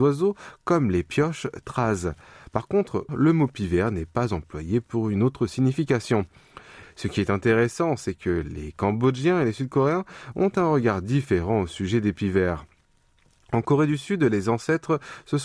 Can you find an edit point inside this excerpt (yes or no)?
yes